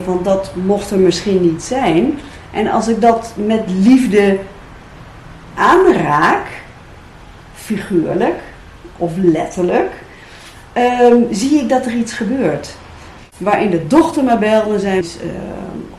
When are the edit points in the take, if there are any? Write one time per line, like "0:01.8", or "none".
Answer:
0:13.2
0:15.0